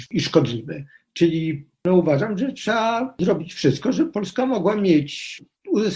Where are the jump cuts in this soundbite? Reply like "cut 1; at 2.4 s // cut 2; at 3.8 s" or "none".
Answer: cut 1; at 1.0 s